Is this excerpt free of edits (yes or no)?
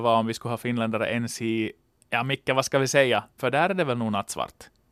no